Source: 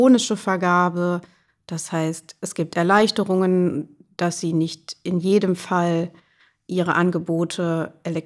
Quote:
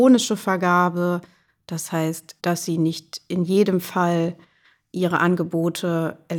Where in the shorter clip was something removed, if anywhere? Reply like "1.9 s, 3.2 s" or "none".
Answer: 2.4 s